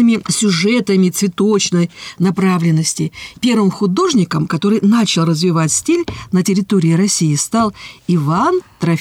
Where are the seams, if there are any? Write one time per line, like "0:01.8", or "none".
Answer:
0:03.4